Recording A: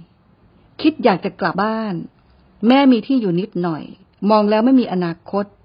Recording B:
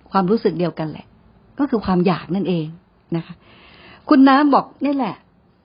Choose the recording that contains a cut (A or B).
A